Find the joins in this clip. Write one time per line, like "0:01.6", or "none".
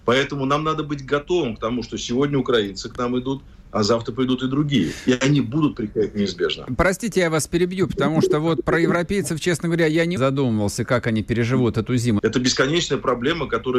0:10.2
0:12.2